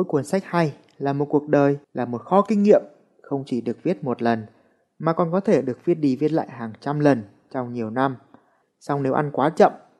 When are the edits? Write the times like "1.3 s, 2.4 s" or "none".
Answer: 1.8 s, 8.6 s